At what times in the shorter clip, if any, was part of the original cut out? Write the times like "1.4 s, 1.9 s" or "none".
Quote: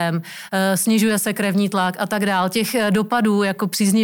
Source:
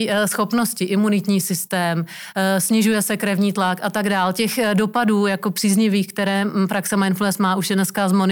none